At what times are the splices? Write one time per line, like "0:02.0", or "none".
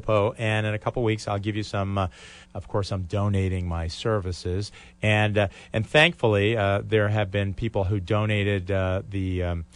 0:02.4